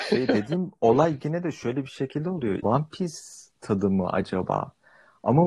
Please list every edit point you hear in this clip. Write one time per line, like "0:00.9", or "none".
0:02.6